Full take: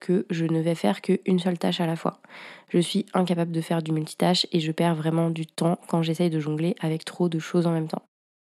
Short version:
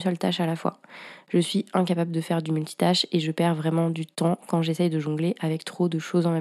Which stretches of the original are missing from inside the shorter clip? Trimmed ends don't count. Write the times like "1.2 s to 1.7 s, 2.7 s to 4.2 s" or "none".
none